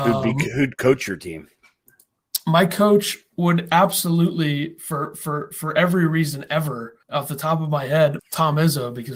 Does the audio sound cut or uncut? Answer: cut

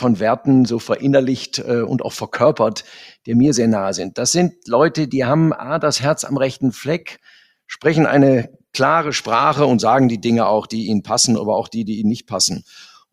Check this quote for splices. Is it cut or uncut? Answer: uncut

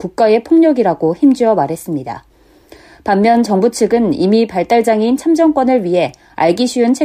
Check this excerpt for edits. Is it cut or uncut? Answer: uncut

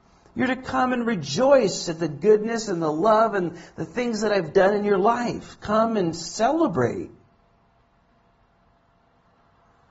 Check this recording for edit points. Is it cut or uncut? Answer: uncut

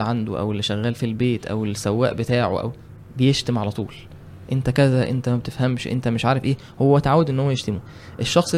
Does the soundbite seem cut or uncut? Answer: uncut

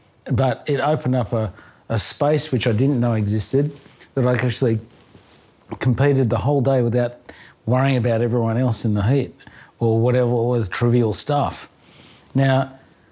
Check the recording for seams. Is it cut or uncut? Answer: uncut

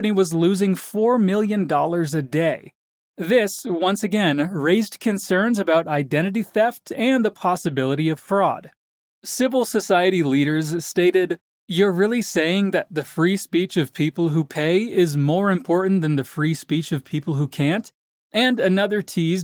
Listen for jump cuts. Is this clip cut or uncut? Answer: uncut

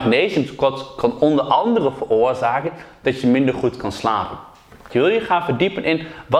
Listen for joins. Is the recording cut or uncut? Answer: cut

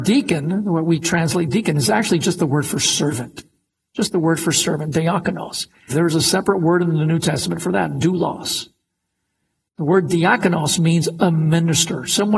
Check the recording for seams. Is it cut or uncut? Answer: cut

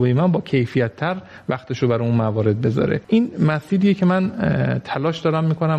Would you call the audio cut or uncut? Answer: cut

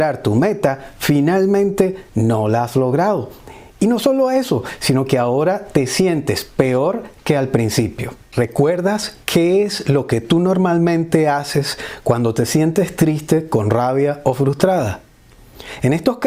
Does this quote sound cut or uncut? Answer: cut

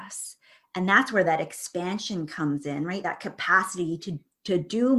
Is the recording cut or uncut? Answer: uncut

